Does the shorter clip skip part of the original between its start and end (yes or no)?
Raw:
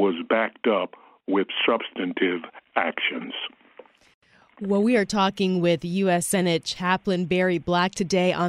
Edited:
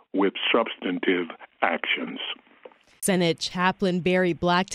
yes